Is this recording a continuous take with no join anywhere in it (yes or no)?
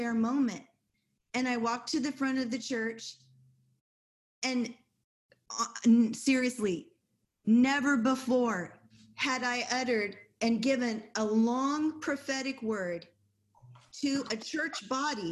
yes